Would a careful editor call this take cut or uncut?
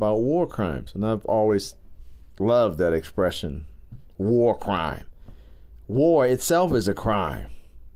uncut